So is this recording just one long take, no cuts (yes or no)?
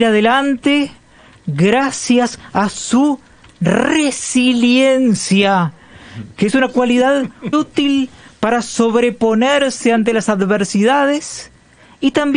no